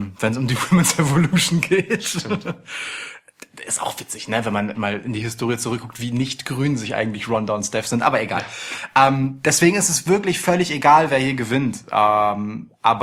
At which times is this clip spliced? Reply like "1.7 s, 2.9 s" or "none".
4.7 s